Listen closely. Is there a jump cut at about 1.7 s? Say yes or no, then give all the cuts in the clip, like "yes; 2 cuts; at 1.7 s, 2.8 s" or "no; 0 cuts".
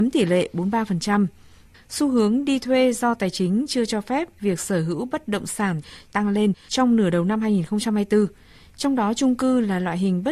yes; 1 cut; at 1.7 s